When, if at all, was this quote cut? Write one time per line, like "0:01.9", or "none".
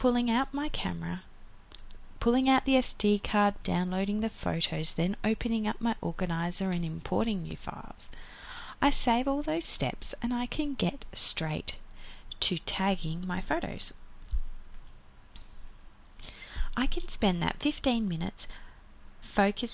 0:03.6